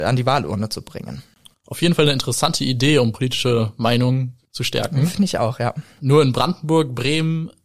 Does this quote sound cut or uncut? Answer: cut